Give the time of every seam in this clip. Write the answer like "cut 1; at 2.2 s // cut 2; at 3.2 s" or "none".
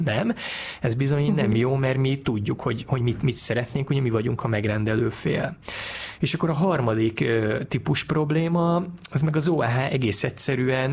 none